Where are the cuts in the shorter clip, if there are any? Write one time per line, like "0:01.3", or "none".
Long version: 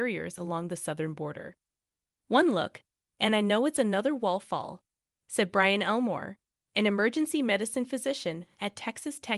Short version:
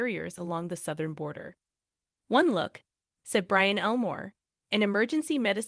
0:03.0